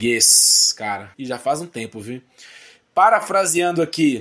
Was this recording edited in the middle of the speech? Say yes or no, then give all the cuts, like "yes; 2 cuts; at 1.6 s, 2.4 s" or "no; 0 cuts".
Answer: yes; 1 cut; at 1.1 s